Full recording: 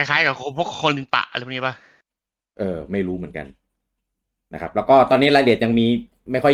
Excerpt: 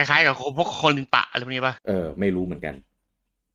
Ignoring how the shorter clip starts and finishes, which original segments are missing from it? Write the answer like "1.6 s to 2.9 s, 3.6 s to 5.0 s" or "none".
1.8 s to 2.5 s